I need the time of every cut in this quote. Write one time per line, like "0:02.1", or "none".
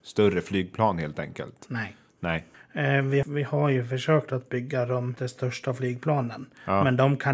0:03.2